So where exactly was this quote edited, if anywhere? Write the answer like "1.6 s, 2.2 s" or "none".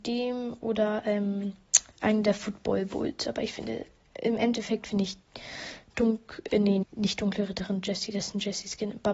6.8 s